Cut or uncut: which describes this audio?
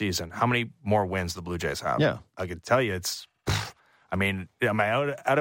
uncut